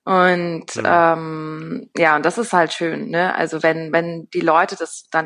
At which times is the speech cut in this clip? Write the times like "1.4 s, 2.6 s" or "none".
none